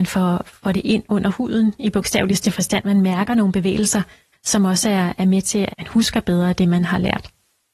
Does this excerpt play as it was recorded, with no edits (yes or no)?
no